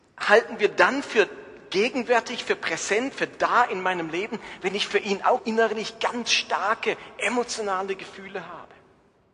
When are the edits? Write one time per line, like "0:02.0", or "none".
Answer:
0:05.4